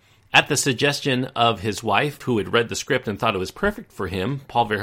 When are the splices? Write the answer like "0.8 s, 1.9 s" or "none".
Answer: none

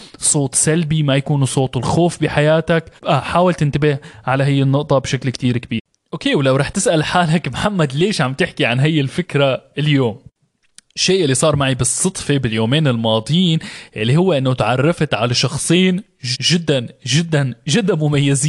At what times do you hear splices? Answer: 3.0 s, 16.3 s

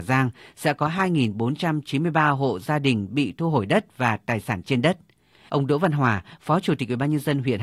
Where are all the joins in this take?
5.5 s

